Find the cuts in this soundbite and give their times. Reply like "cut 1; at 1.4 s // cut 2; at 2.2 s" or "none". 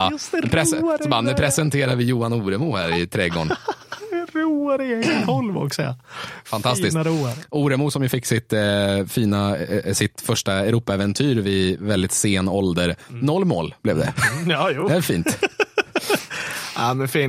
none